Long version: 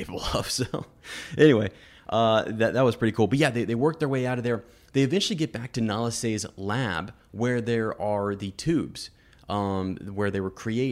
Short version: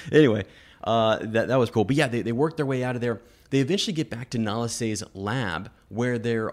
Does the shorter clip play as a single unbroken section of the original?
no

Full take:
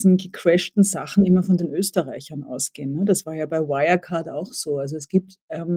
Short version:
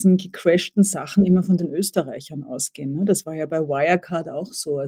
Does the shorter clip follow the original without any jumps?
yes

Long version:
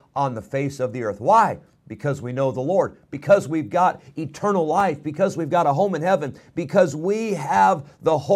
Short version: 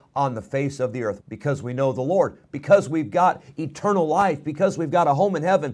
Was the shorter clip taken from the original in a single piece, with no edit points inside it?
no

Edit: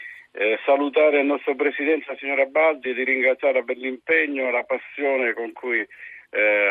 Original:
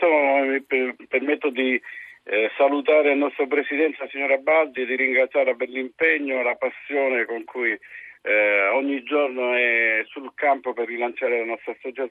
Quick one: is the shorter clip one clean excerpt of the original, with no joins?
yes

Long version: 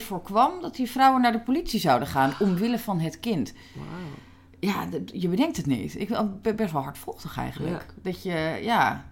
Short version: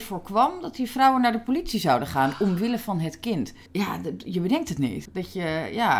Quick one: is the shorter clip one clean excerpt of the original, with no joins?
no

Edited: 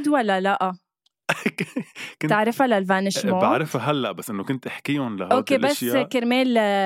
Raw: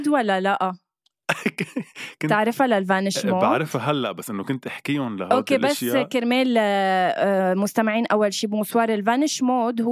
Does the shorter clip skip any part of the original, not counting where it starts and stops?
no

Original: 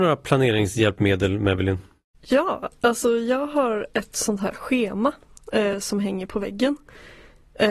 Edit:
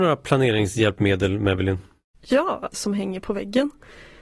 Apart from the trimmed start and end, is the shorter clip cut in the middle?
yes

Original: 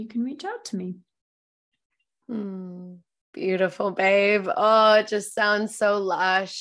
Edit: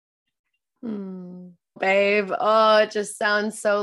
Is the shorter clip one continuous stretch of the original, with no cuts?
no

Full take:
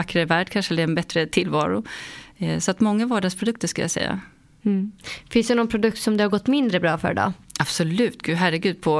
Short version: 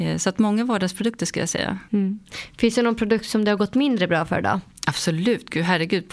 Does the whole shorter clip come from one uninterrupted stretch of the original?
no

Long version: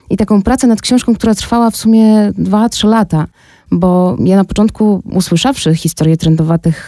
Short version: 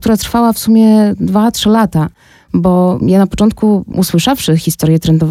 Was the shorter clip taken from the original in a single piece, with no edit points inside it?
yes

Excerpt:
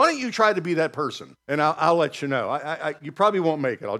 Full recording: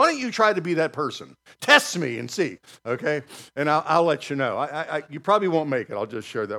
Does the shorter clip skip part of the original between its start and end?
yes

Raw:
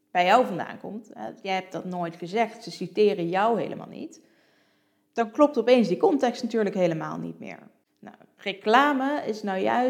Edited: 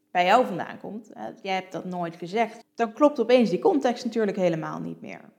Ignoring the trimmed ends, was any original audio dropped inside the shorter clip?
yes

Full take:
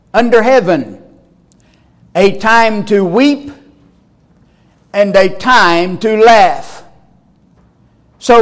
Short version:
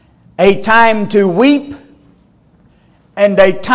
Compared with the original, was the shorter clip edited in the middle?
no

